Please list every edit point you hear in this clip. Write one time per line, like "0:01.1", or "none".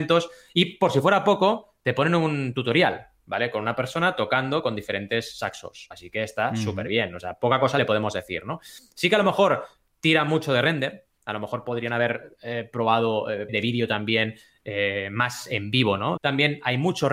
0:13.5
0:16.2